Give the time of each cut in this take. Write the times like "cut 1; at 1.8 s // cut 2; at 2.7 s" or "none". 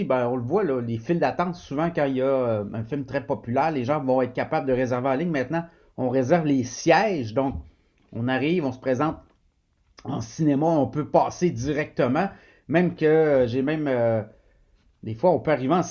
none

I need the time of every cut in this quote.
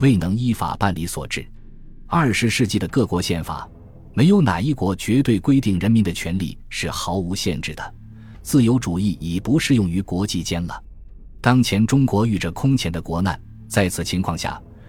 none

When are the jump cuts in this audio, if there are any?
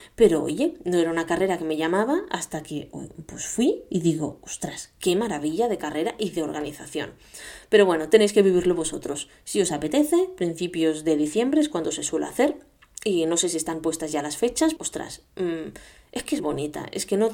cut 1; at 14.8 s // cut 2; at 16.4 s

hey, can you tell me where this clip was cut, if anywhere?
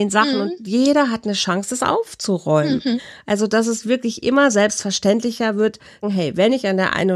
cut 1; at 6.0 s

